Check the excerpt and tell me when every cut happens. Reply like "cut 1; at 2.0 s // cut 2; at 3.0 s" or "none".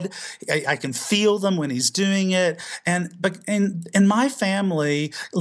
none